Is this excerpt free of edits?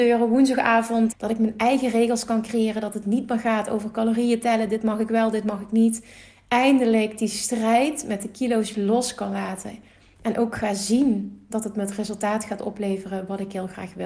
no; 1 cut; at 1.1 s

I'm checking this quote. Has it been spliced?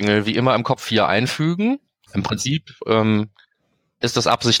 yes; 1 cut; at 2.1 s

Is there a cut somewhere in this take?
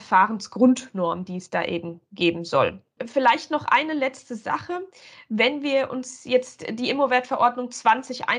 yes; 1 cut; at 3.0 s

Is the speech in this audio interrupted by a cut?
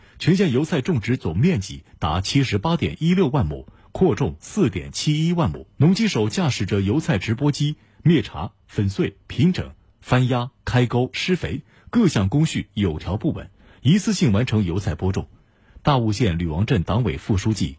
yes; 1 cut; at 5.8 s

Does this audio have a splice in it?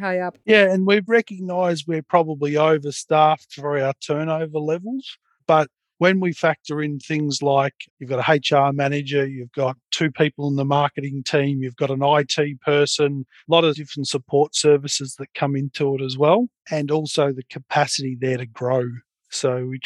no; 0 cuts

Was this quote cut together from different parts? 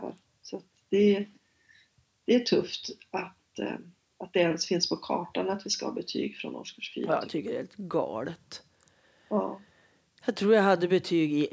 no; 0 cuts

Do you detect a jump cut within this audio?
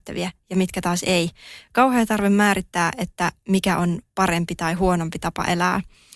no; 0 cuts

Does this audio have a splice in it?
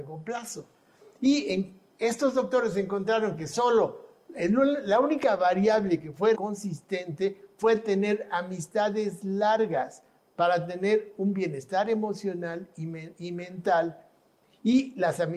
yes; 1 cut; at 6.3 s

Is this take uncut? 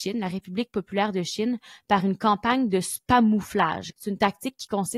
no; 1 cut; at 3.9 s

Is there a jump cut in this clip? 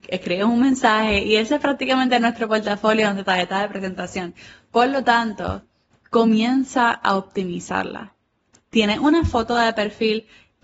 no; 0 cuts

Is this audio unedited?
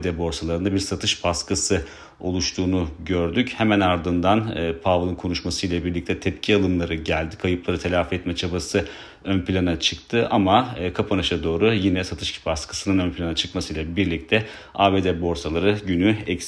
yes; 0 cuts

